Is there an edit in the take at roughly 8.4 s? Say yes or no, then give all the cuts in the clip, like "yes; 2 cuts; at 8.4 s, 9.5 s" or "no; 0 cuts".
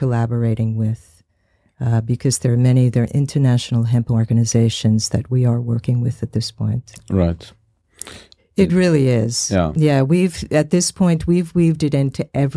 yes; 1 cut; at 8.4 s